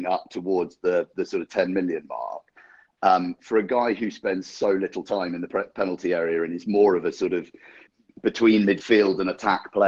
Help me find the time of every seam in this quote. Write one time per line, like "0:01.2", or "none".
none